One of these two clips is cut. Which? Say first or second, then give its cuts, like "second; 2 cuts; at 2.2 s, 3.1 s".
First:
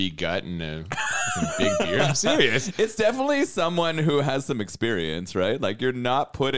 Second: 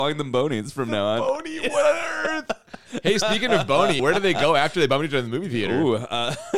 second; 1 cut; at 4.0 s